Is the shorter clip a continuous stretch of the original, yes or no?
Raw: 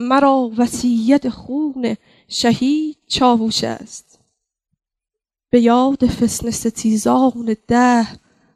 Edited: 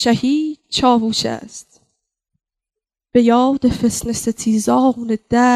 yes